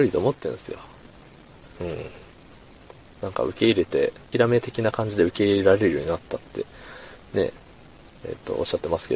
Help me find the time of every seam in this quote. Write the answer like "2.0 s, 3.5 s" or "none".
1.6 s, 4.3 s